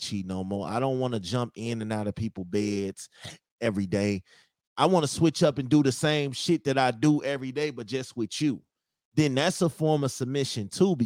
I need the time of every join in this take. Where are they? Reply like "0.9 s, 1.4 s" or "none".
none

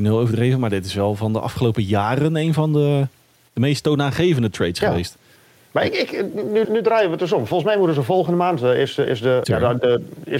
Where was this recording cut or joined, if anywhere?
6.6 s, 9.4 s

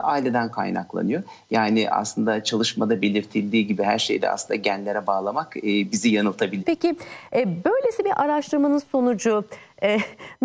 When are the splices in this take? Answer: 6.6 s

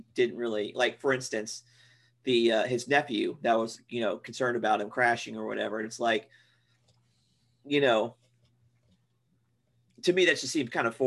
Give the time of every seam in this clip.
none

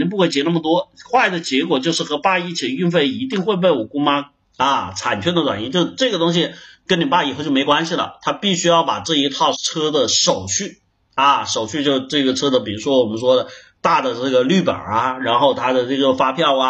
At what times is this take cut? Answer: 4.4 s, 9.5 s

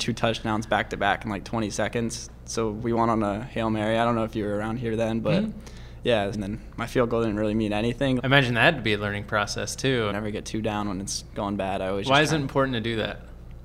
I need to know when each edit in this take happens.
6.3 s, 8.2 s, 10.1 s

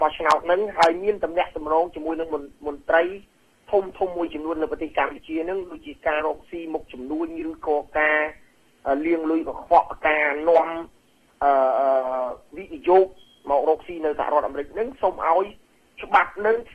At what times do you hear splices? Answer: 6.2 s

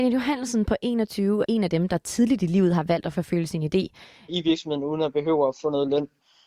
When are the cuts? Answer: 1.4 s, 4.3 s

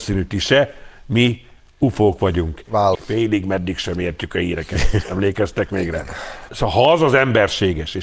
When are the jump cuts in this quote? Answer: 2.9 s, 6.5 s

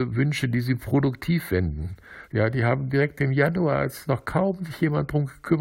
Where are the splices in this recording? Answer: 2.2 s

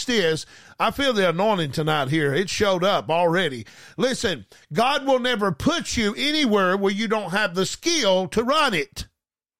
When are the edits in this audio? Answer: none

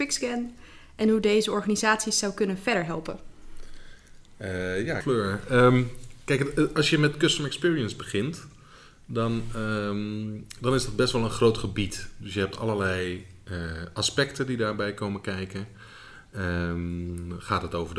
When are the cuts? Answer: 5.0 s

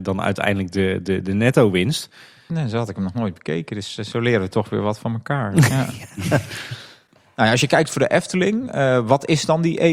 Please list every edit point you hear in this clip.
2.5 s

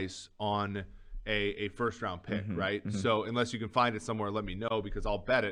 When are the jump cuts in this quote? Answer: none

